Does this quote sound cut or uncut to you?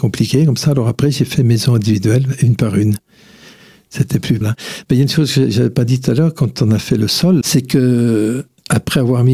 cut